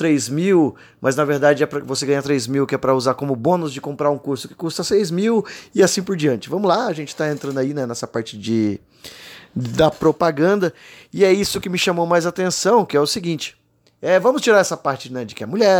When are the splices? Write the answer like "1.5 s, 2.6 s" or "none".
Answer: none

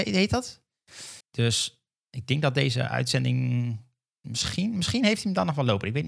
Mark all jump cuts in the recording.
1.2 s

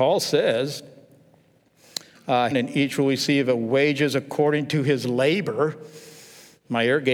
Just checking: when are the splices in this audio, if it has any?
2.5 s

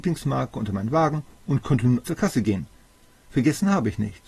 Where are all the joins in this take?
2.0 s

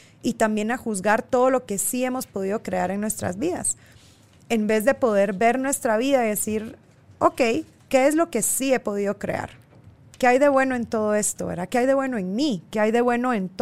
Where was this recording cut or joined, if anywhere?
none

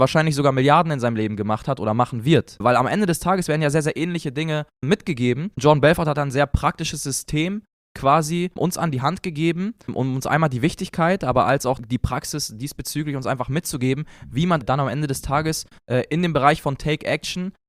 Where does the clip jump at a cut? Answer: none

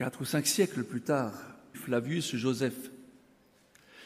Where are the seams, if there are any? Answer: 1.7 s

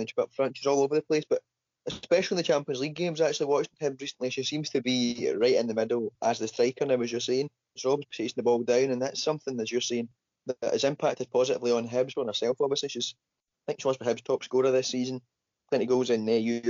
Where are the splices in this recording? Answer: 7.8 s, 12.1 s

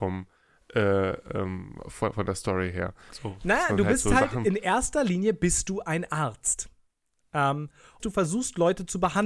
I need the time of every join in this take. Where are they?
3.1 s, 8.0 s

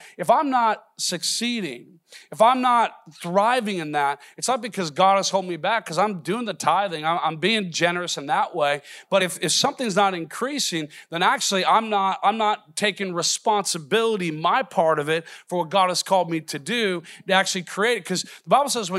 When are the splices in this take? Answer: none

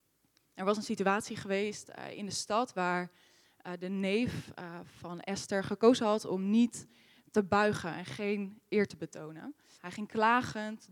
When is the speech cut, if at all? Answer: 9.7 s

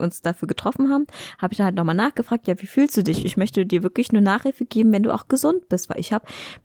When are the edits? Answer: none

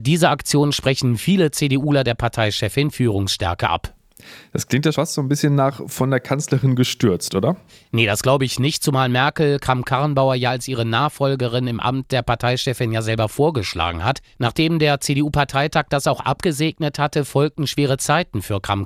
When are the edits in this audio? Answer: 4.9 s

